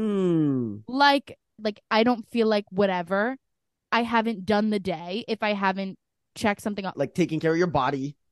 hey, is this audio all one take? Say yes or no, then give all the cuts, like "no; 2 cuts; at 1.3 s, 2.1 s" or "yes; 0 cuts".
no; 2 cuts; at 1.6 s, 6.9 s